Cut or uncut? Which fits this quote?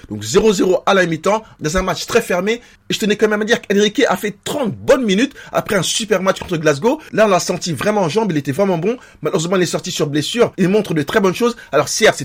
cut